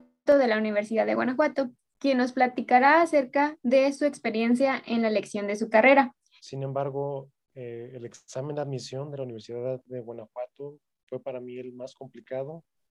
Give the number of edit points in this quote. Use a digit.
2